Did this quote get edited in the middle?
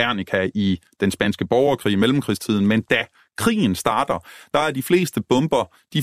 no; 0 cuts

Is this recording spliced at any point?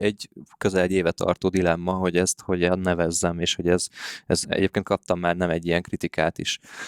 yes; 1 cut; at 4.4 s

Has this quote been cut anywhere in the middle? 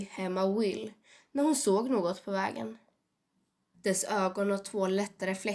yes; 1 cut; at 3.7 s

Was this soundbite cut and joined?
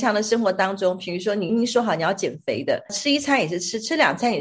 yes; 2 cuts; at 1.5 s, 2.9 s

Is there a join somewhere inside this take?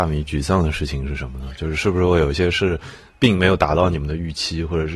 no; 0 cuts

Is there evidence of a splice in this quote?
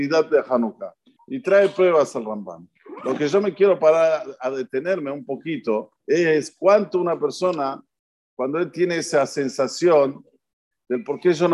yes; 2 cuts; at 1.2 s, 6.0 s

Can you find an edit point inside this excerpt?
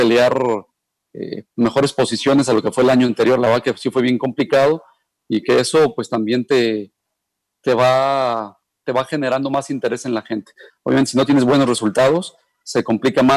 no; 0 cuts

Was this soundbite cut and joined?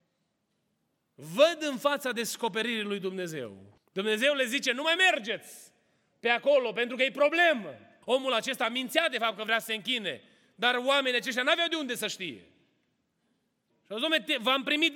yes; 3 cuts; at 3.8 s, 8.0 s, 13.7 s

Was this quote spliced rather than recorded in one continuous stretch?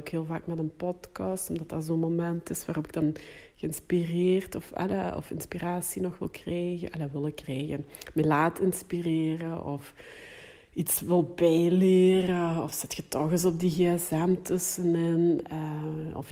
no; 0 cuts

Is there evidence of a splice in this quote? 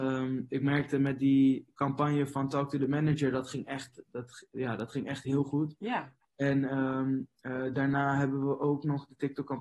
no; 0 cuts

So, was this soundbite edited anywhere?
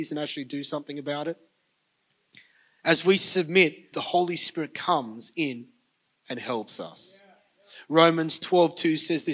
yes; 1 cut; at 3.9 s

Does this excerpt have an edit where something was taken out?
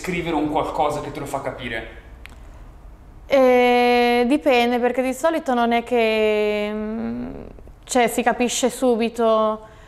no; 0 cuts

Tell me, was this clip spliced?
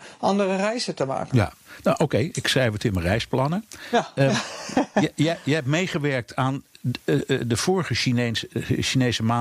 no; 0 cuts

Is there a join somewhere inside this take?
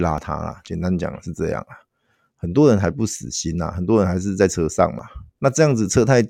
no; 0 cuts

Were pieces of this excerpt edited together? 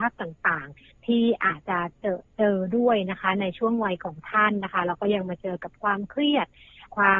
yes; 1 cut; at 1.6 s

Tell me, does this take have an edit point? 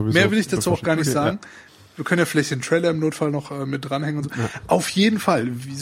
no; 0 cuts

